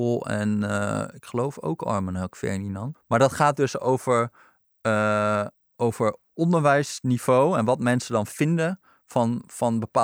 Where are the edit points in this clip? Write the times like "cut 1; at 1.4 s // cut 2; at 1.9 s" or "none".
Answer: cut 1; at 2.9 s // cut 2; at 5.5 s